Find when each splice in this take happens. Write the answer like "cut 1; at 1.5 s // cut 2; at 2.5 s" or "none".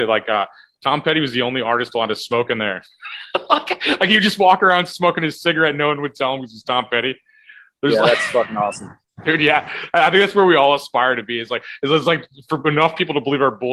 none